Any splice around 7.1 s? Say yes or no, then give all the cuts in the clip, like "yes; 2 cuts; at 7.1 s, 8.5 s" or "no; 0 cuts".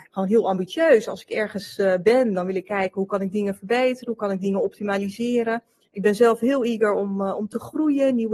no; 0 cuts